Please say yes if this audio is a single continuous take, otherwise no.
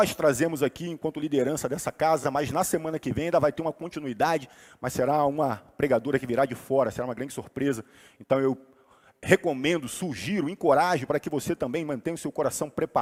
yes